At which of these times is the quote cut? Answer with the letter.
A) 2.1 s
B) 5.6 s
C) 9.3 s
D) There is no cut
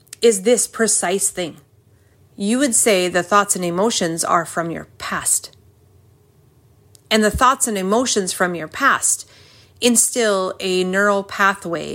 A